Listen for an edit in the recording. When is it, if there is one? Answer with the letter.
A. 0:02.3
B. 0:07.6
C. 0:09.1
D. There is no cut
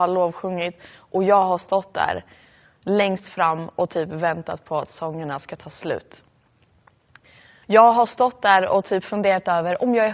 B